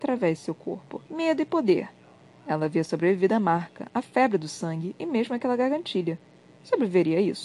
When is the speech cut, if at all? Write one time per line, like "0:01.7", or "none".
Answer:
0:01.1